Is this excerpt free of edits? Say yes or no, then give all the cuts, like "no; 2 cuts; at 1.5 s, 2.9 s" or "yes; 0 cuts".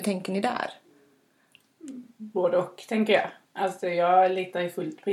yes; 0 cuts